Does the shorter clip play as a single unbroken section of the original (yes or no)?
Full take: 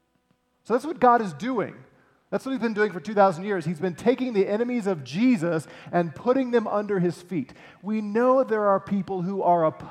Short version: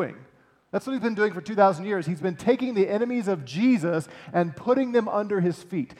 yes